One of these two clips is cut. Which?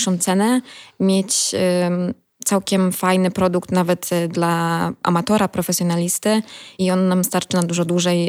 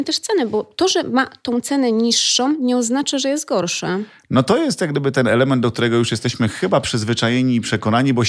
first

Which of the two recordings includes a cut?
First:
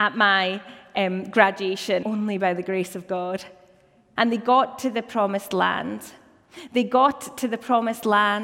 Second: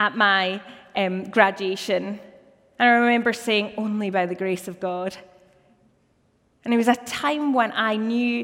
first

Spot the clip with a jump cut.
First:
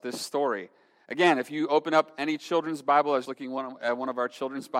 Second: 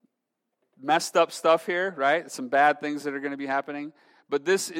first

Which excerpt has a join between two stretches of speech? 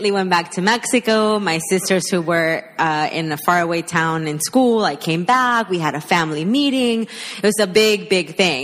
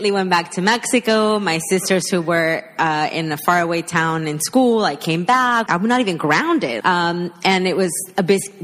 second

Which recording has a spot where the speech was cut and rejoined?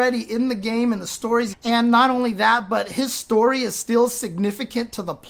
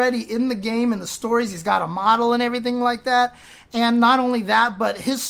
first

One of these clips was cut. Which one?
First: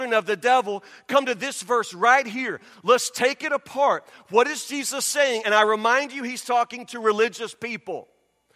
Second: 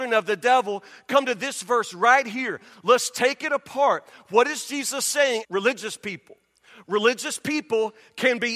second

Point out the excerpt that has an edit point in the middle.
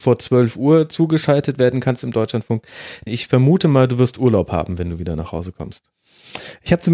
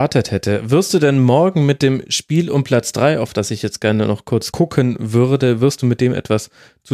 first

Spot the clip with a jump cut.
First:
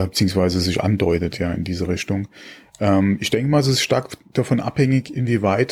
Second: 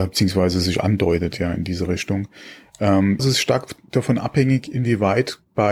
second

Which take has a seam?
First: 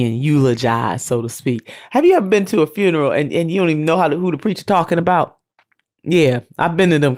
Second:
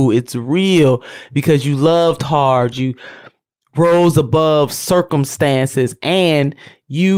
second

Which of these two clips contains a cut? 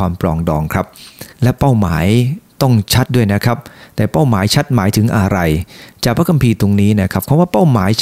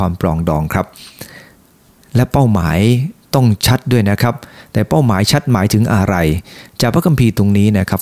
first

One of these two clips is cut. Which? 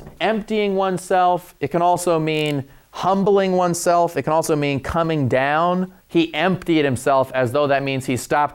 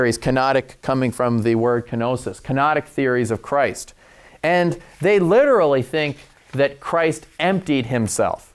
first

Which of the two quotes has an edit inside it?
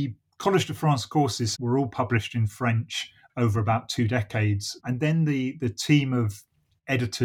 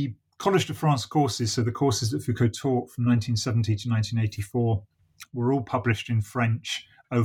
first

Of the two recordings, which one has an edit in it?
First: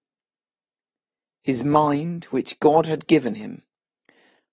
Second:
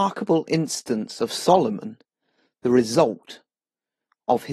first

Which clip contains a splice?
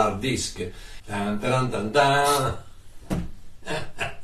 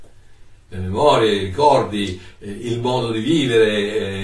first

